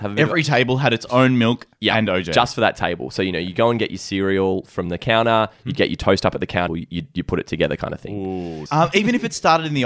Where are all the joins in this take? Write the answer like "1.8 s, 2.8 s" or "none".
6.7 s, 8.7 s